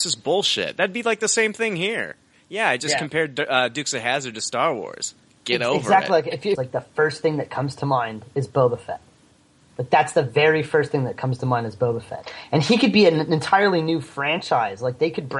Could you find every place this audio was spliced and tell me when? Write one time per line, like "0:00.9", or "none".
0:06.5